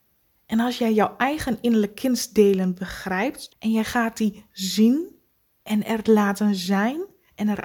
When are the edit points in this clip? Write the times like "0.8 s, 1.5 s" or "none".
3.5 s